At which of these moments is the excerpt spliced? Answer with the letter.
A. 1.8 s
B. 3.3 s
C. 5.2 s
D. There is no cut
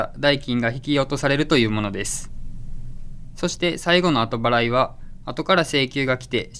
C